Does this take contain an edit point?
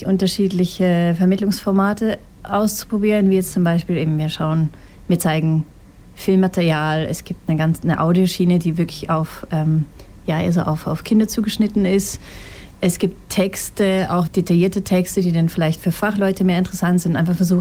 yes; 1 cut; at 14.3 s

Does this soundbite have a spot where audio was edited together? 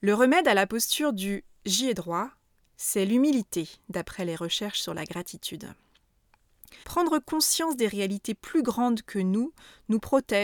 yes; 1 cut; at 6.8 s

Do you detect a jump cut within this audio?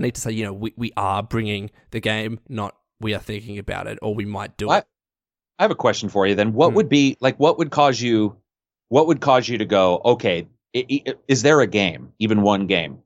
no; 0 cuts

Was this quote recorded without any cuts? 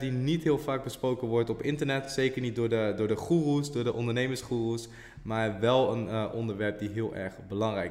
yes; 0 cuts

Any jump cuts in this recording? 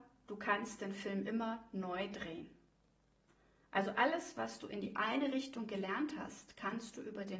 no; 0 cuts

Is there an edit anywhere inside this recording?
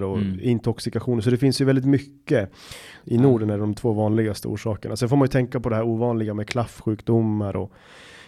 yes; 1 cut; at 3.0 s

